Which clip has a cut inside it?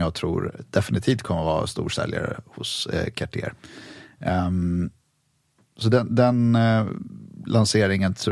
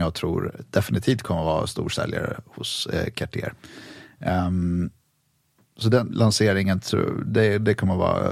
second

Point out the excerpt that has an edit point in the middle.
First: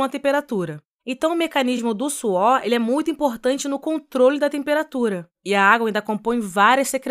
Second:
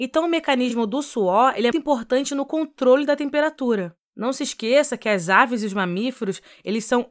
second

